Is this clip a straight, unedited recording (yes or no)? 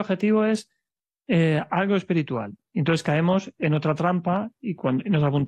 yes